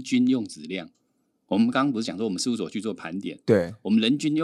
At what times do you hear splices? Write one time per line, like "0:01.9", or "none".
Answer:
none